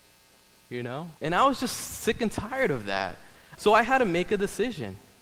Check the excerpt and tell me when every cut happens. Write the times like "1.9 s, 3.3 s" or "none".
1.2 s, 3.6 s